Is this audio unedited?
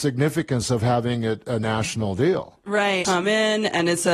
no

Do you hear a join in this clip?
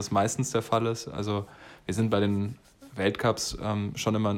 no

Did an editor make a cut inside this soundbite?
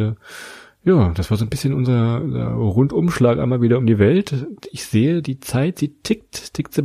no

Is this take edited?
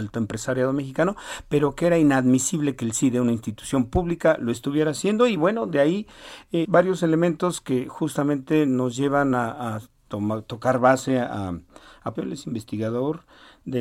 yes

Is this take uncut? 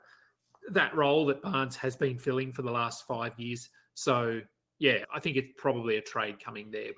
no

